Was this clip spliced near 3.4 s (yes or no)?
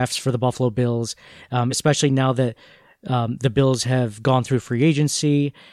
no